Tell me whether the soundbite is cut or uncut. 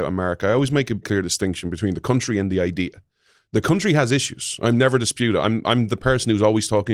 cut